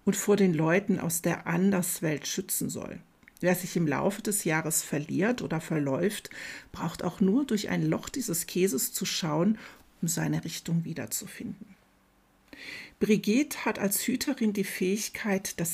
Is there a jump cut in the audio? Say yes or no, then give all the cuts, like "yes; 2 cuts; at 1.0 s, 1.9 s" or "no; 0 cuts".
no; 0 cuts